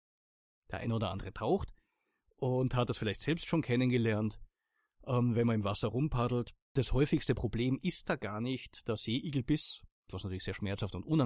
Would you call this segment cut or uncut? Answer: cut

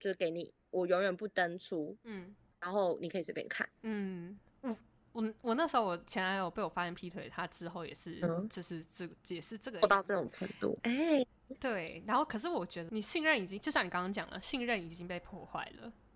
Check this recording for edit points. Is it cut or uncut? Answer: cut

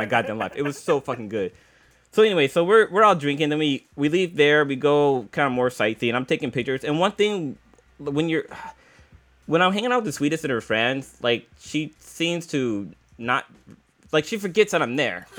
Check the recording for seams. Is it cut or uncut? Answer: uncut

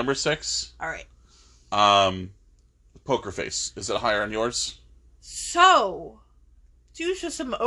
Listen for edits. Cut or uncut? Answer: uncut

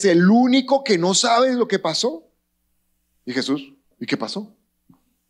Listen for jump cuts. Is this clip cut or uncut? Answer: cut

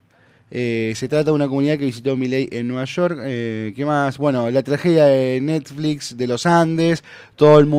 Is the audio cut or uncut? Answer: uncut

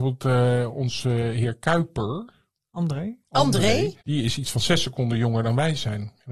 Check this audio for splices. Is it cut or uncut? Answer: cut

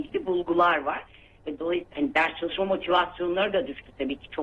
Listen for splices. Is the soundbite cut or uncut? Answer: uncut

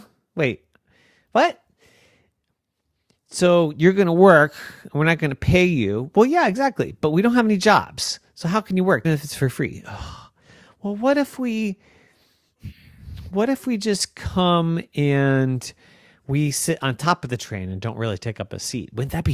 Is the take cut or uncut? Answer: cut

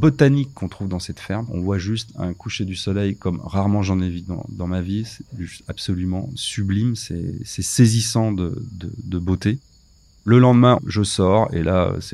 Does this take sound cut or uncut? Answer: cut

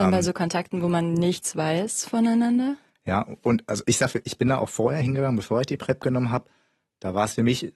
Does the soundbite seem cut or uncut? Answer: uncut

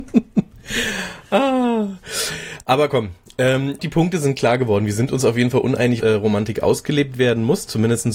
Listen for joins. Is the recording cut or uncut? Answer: cut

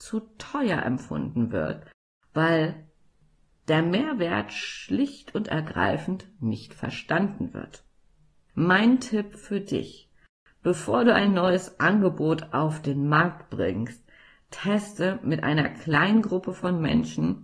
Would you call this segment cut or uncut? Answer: uncut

